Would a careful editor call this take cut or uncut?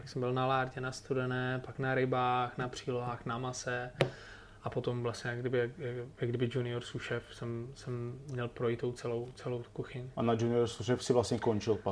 uncut